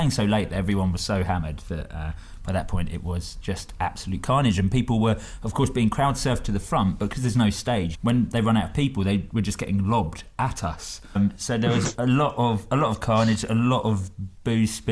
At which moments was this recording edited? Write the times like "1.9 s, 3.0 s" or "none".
7.9 s, 11.2 s